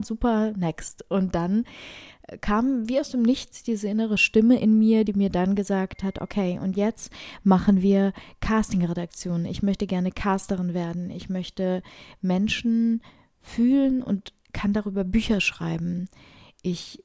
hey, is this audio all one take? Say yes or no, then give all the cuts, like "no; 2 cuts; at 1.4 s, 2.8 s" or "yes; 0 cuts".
yes; 0 cuts